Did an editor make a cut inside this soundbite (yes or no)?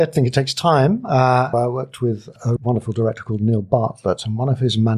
yes